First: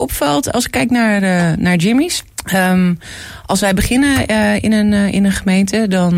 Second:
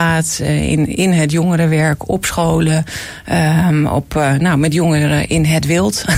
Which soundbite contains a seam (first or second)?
first